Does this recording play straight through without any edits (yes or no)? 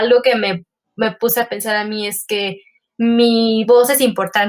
yes